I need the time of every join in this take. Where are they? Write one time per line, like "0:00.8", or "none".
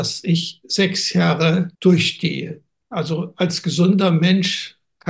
0:01.7

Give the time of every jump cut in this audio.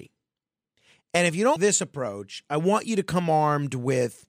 0:01.6

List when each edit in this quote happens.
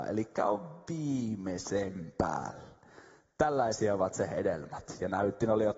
none

